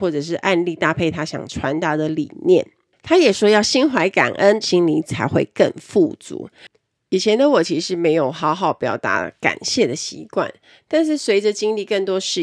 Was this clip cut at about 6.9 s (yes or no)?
no